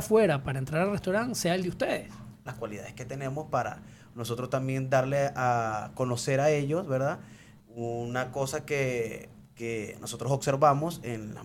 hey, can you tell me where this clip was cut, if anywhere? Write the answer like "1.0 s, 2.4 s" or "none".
2.5 s, 7.6 s

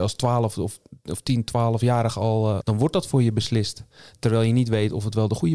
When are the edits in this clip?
2.6 s

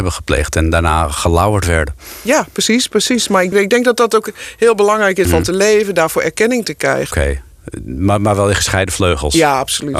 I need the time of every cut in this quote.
3.5 s, 5.3 s, 7.1 s

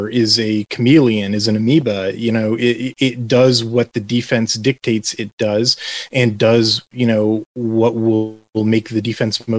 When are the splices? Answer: none

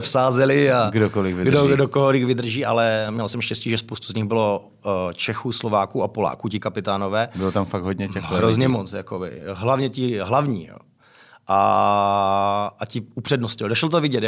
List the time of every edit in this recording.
none

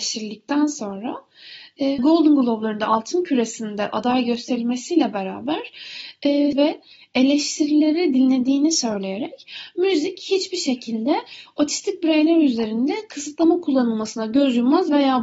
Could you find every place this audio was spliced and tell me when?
2.0 s, 6.5 s

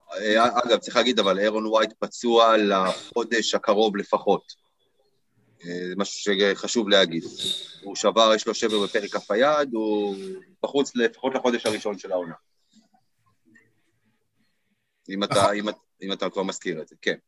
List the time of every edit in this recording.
none

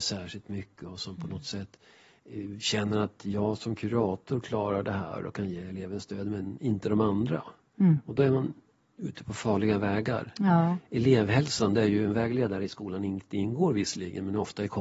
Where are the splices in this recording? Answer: none

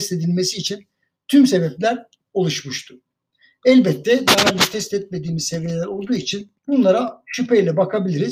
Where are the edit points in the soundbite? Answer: 6.6 s

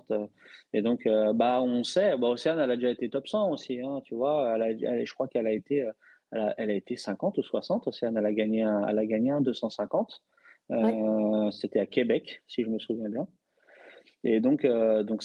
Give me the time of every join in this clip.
none

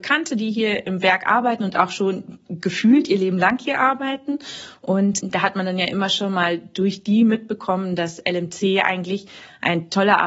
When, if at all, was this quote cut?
none

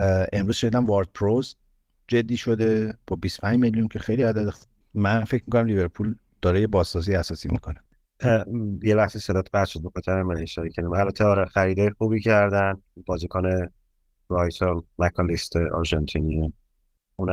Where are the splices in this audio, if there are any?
none

